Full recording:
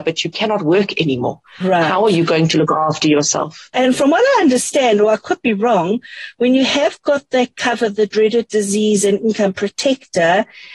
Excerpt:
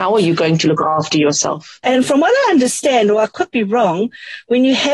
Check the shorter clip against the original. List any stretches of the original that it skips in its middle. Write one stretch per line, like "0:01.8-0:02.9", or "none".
none